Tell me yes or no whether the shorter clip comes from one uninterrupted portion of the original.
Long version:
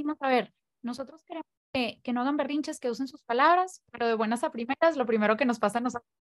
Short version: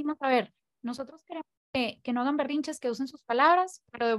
yes